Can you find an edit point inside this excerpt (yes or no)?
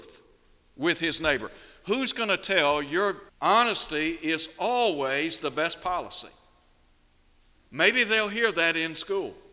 yes